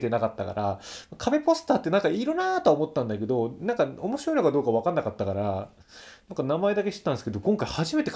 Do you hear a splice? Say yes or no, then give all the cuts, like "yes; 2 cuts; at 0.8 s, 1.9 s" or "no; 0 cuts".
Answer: no; 0 cuts